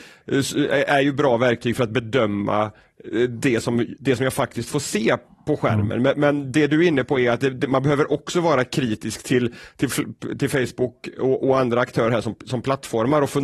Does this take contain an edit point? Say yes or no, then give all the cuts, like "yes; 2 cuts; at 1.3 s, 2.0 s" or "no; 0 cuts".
no; 0 cuts